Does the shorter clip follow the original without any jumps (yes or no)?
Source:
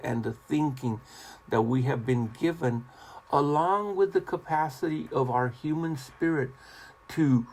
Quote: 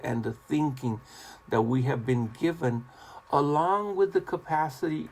yes